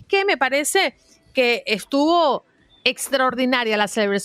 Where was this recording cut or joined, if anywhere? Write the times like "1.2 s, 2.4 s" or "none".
none